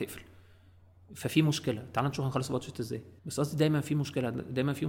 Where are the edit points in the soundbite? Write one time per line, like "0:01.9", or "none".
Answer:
0:03.2